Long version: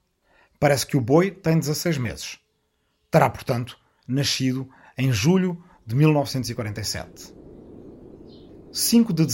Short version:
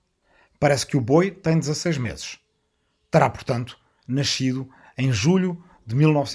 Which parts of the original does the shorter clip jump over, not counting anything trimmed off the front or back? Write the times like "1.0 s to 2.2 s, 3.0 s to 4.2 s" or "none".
none